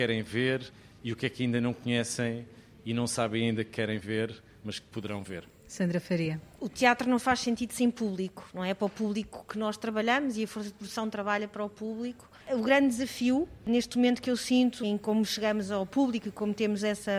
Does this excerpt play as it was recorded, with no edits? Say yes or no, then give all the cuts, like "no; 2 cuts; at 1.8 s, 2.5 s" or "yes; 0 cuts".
no; 2 cuts; at 12.4 s, 14.8 s